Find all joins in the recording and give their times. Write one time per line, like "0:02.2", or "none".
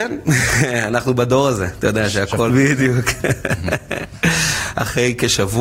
0:02.5